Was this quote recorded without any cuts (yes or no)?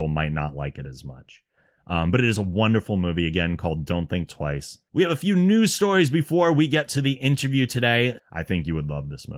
no